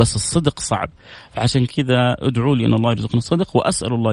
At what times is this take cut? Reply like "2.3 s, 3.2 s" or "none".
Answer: none